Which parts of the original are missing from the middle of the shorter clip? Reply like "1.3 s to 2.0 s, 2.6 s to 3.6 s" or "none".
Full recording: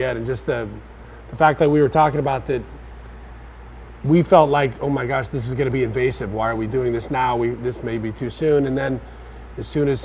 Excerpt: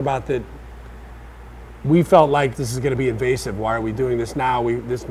4.7 s to 5.3 s